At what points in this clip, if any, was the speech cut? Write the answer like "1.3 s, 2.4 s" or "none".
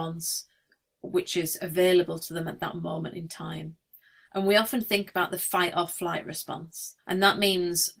4.2 s, 7.0 s